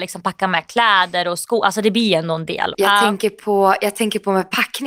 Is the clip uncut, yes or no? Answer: no